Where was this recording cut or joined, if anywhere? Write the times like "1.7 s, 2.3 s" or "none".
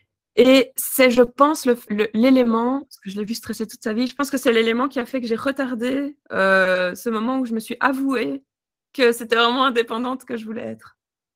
1.9 s